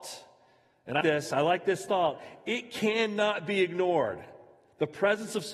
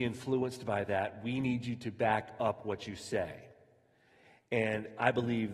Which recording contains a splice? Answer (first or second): first